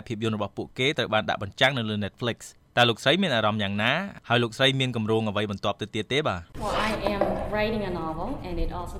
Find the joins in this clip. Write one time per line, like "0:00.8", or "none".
0:06.5